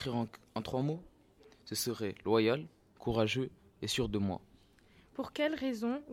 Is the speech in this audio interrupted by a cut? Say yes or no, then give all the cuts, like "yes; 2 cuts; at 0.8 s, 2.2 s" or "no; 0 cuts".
no; 0 cuts